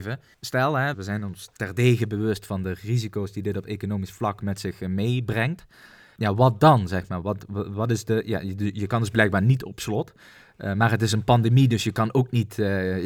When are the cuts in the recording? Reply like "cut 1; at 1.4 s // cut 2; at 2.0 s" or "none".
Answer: none